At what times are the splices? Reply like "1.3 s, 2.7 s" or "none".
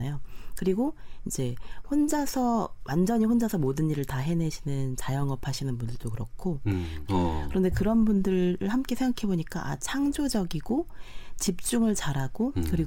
7.1 s

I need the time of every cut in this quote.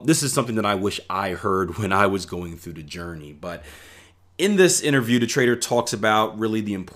none

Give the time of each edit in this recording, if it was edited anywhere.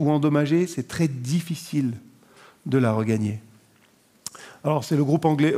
none

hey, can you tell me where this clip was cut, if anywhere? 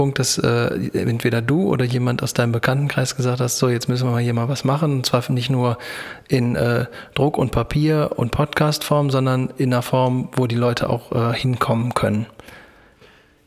none

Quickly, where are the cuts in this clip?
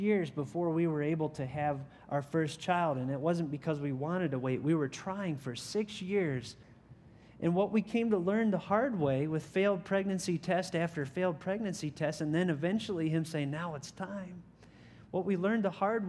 none

